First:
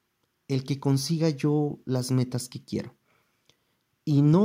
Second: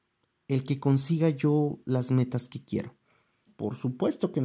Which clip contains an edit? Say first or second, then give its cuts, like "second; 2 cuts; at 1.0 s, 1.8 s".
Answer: second; 1 cut; at 3.5 s